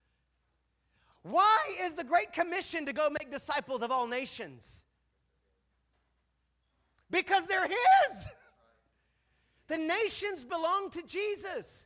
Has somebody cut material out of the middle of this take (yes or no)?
yes